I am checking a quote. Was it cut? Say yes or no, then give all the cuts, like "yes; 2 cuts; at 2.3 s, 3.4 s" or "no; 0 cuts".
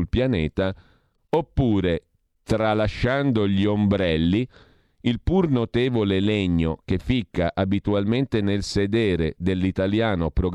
no; 0 cuts